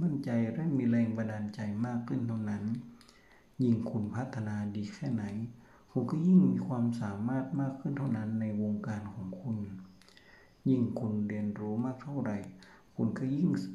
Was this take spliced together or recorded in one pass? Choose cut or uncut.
uncut